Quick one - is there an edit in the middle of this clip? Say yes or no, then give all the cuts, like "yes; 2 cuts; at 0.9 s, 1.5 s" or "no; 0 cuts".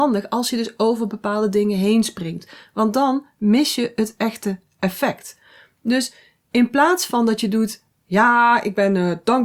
no; 0 cuts